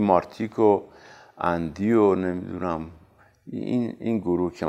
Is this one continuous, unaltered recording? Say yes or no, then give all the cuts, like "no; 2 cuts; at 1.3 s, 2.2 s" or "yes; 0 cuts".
yes; 0 cuts